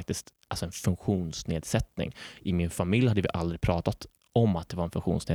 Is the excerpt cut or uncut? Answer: uncut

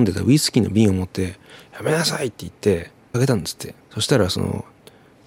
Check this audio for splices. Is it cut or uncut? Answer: cut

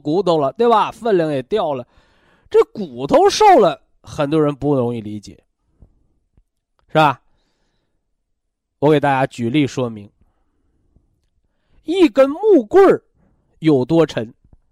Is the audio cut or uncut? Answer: uncut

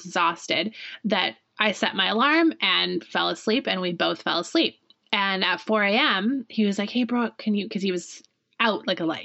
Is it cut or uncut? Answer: uncut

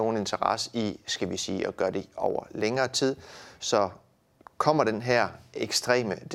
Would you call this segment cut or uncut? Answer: uncut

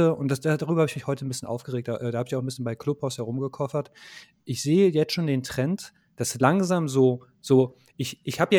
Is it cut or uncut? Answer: uncut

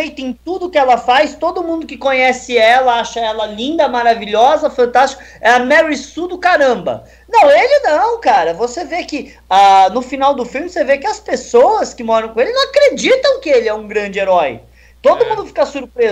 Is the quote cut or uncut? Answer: uncut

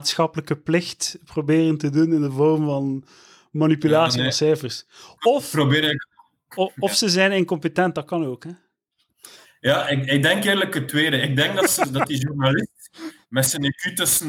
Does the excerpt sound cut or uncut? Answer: uncut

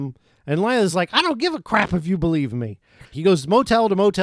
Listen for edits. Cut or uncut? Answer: cut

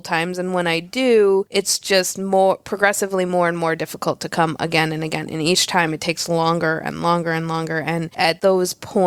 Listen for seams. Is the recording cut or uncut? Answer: uncut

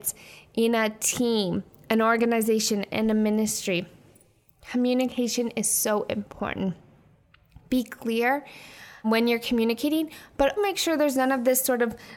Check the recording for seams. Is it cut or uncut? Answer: cut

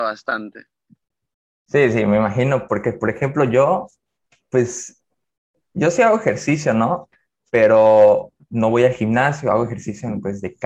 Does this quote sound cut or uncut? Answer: uncut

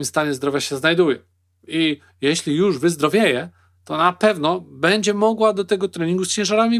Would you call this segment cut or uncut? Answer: uncut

